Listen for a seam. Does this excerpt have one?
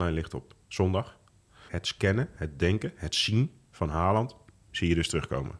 yes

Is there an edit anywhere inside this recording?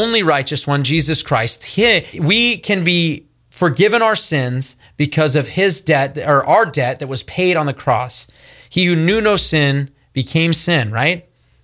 yes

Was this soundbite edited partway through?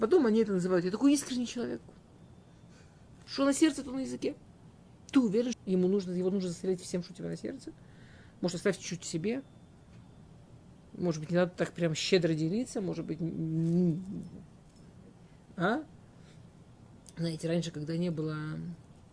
yes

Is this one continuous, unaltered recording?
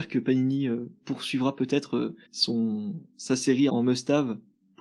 no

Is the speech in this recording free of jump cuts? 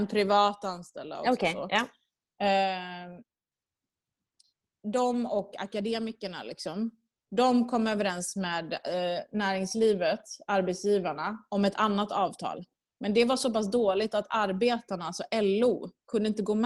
yes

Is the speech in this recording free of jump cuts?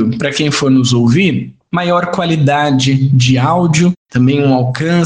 yes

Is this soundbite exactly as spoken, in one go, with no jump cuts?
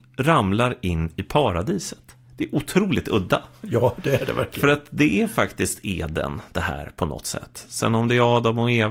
no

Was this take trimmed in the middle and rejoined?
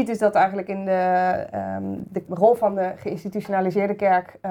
yes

